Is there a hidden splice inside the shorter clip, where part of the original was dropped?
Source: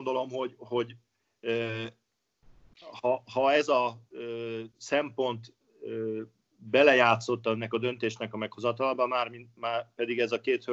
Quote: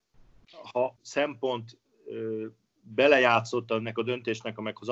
yes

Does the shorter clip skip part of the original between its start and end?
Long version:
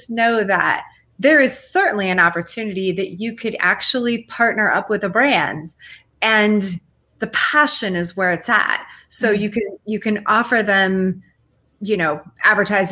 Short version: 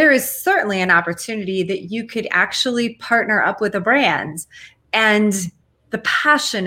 no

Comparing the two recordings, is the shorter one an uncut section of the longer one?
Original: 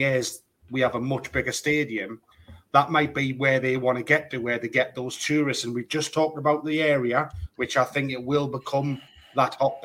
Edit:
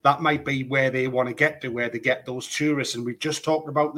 yes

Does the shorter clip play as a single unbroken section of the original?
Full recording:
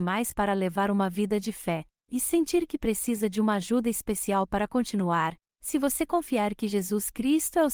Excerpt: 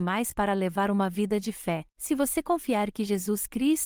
no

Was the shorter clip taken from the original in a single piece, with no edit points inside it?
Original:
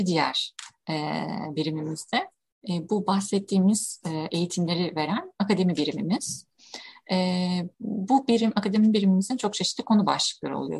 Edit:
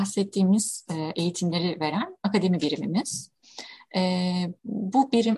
yes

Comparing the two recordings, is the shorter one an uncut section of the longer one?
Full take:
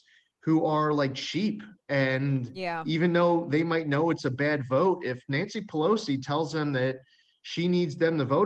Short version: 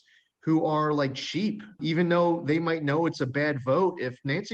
no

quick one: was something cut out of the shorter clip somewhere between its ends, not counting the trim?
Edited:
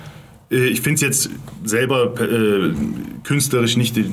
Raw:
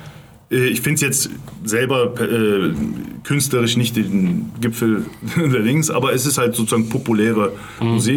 no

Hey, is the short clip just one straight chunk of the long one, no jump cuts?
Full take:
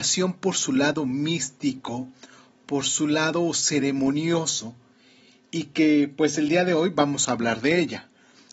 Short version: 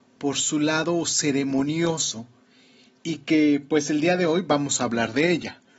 yes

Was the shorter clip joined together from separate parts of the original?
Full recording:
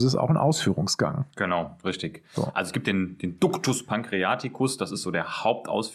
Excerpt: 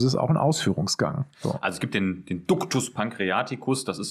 yes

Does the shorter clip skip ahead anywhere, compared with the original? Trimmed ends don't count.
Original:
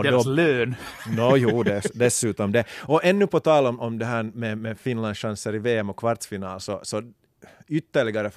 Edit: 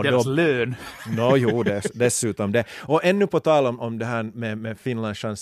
no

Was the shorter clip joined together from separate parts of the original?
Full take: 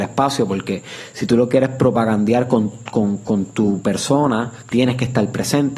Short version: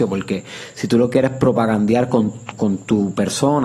yes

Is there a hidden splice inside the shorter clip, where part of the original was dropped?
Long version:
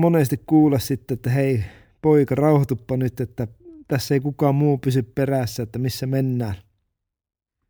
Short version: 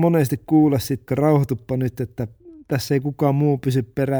yes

